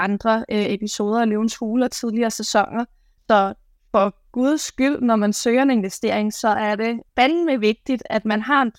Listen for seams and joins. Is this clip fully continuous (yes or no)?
no